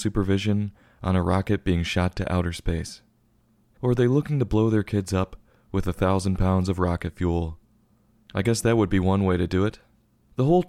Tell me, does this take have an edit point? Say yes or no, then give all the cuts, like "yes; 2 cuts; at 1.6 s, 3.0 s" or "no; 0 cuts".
yes; 1 cut; at 3.8 s